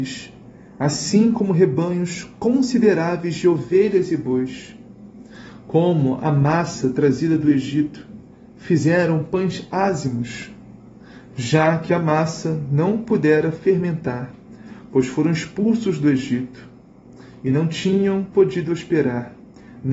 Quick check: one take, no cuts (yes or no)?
yes